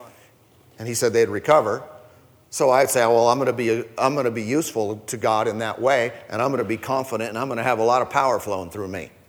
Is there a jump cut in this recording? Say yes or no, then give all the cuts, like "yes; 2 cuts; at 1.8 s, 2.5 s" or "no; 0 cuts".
no; 0 cuts